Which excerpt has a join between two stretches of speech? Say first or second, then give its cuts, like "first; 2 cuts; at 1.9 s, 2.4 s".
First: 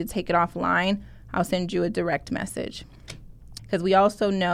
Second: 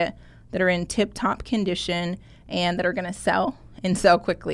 first; 1 cut; at 3.6 s